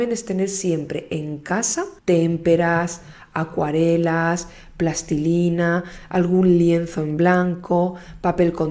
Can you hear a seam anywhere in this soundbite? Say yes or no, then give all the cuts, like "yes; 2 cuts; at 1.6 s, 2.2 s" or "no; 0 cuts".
yes; 1 cut; at 2.0 s